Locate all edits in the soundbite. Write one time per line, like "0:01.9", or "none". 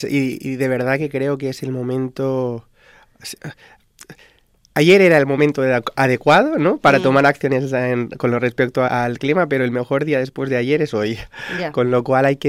0:08.8